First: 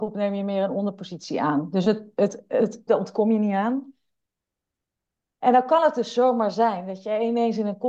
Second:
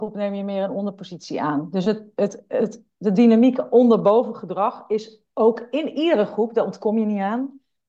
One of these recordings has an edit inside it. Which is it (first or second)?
first